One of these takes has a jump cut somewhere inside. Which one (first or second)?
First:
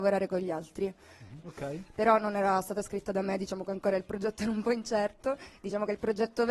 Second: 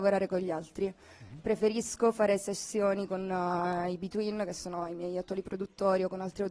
first